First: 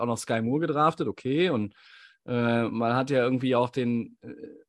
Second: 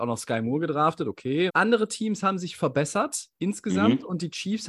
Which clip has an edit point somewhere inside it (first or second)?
second